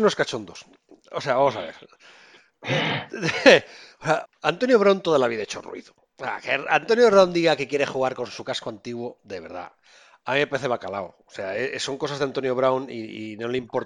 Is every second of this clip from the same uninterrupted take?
no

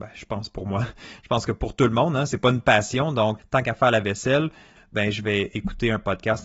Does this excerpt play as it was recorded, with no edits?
no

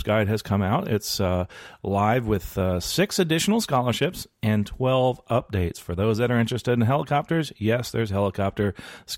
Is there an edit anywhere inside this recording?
no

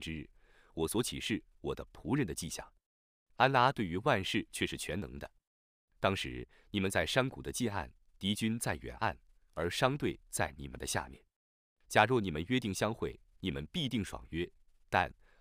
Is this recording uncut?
yes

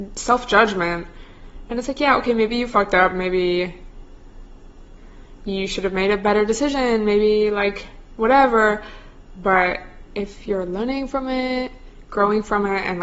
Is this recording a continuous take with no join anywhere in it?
yes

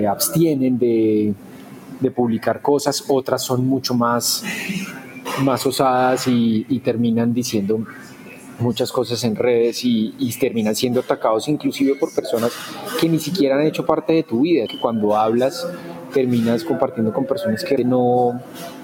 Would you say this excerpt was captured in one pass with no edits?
no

